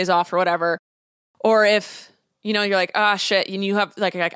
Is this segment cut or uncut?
uncut